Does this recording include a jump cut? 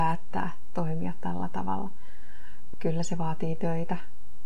no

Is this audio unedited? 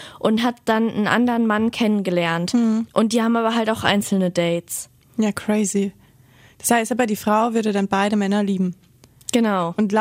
no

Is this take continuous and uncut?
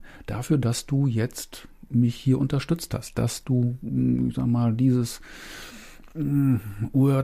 yes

